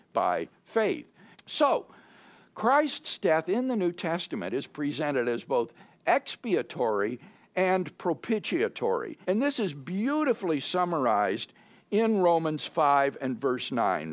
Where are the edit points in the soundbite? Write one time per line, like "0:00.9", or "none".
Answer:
0:01.3
0:09.2